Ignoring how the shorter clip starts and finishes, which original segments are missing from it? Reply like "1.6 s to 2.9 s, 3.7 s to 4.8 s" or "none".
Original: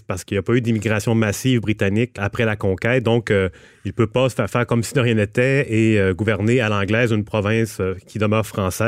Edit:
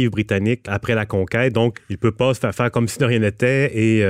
3.2 s to 3.7 s

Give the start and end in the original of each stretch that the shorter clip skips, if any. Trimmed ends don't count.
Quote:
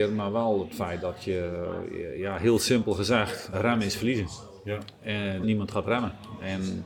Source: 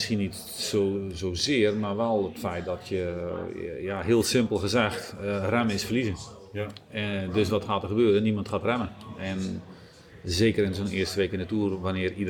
5.2 s to 5.4 s, 7.3 s to 8.2 s

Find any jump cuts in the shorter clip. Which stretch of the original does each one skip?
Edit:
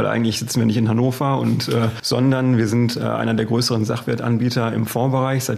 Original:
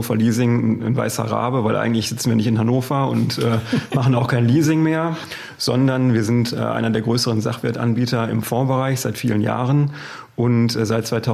3.7 s to 5.6 s

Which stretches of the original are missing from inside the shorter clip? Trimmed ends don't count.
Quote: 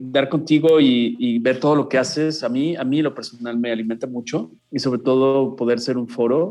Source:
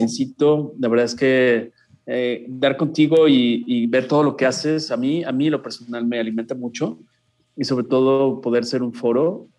7.1 s to 7.4 s

